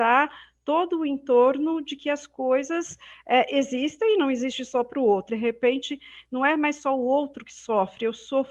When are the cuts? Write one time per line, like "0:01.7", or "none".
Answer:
0:05.3